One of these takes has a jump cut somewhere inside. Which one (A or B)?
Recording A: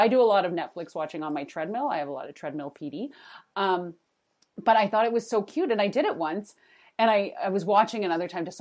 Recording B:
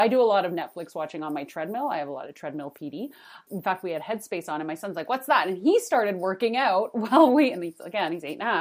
B